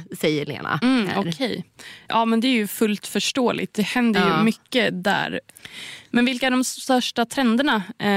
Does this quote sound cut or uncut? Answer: uncut